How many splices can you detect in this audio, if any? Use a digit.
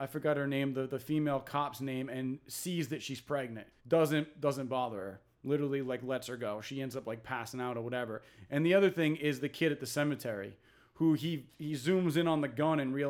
1